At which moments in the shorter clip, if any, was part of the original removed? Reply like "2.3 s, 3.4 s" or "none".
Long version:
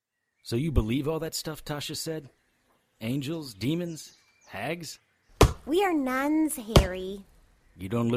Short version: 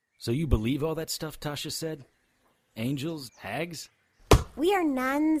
3.3 s